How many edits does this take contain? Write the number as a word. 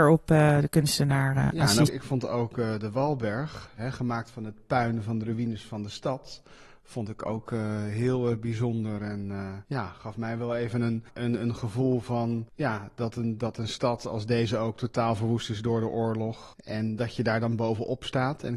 one